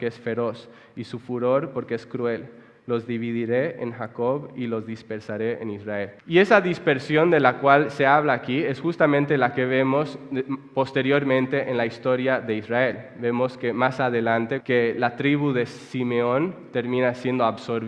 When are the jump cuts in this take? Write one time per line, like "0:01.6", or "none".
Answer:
0:06.2
0:14.6